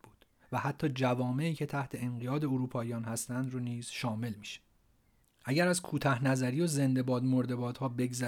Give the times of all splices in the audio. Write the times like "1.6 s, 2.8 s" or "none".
5.2 s